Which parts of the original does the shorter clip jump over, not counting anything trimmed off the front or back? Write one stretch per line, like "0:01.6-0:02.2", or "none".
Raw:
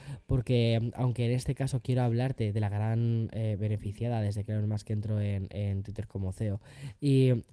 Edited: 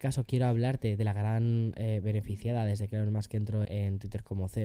0:05.2-0:05.5